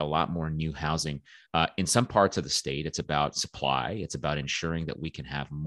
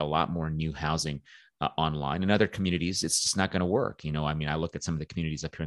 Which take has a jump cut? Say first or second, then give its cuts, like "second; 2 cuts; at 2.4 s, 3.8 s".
first; 1 cut; at 1.4 s